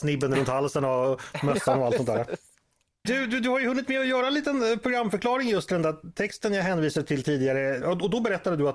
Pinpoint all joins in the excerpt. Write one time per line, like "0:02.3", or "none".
0:03.0
0:07.8